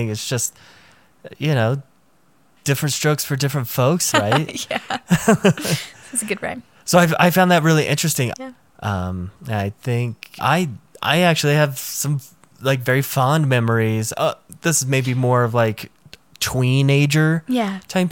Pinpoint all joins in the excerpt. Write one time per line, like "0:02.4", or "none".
0:04.1
0:08.3
0:10.4

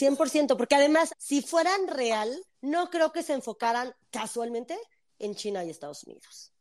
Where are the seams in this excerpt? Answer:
0:01.1
0:02.5

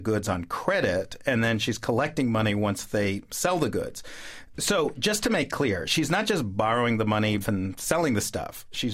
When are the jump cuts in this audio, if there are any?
0:04.5
0:07.4

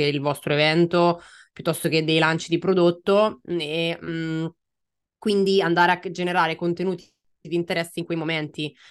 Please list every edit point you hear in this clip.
none

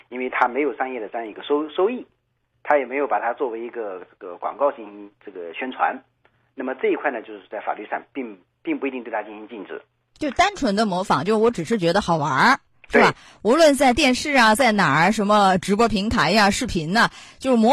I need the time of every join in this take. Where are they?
none

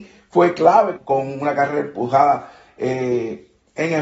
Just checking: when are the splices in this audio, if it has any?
0:01.0

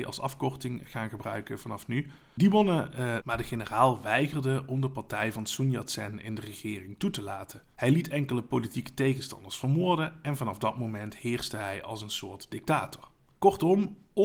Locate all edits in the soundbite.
0:03.2

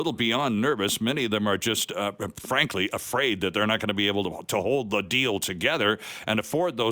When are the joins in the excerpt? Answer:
none

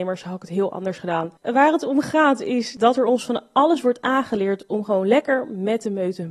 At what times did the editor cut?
0:01.4

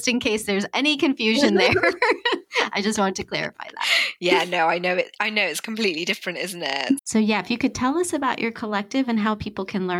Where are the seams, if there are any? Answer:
0:07.0

